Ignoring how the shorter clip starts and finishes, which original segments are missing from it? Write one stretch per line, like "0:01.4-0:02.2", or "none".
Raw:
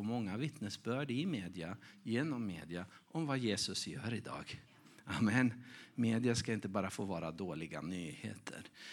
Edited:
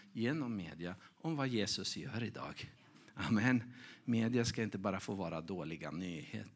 none